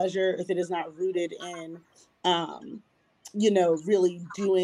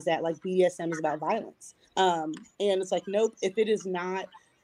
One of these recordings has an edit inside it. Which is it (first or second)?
second